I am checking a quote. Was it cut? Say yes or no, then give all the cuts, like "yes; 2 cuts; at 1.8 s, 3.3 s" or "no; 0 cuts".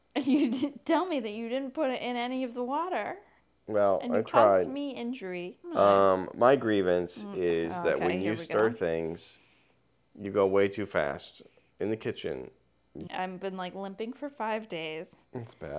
yes; 2 cuts; at 5.6 s, 13.1 s